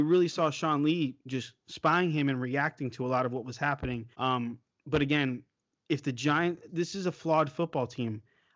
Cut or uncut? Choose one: cut